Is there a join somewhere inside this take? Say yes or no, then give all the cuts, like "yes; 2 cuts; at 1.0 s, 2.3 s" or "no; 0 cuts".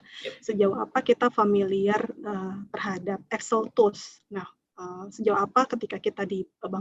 no; 0 cuts